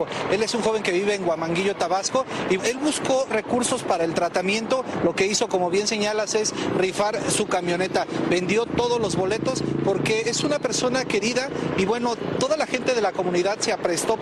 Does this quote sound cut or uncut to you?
cut